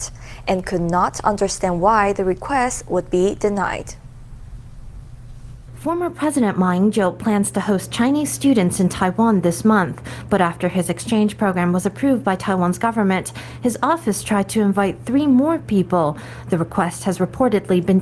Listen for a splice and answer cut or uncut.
uncut